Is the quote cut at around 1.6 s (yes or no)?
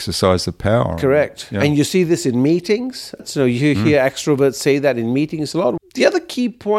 no